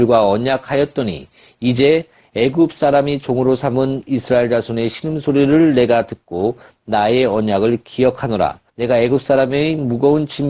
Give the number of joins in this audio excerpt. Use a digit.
1